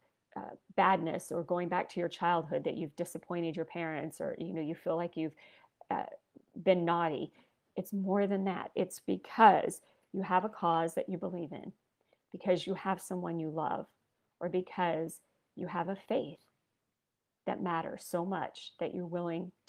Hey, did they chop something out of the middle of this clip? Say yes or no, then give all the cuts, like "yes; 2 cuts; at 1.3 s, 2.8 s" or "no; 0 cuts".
no; 0 cuts